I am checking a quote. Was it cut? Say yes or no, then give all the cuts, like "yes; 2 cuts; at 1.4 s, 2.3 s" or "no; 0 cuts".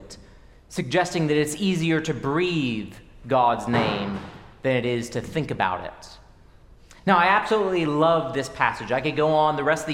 no; 0 cuts